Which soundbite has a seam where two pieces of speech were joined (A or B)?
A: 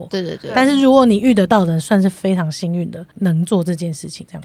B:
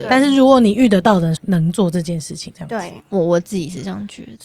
B